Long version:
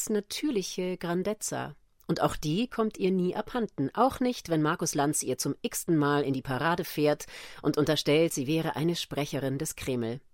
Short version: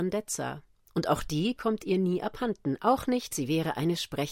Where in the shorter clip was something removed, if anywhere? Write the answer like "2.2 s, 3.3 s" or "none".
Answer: 3.3 s